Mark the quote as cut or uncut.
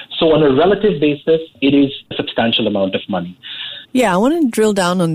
cut